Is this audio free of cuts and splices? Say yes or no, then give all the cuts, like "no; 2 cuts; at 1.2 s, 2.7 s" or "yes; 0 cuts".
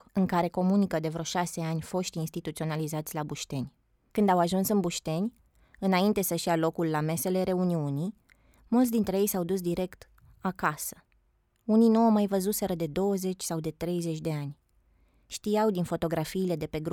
no; 1 cut; at 4.1 s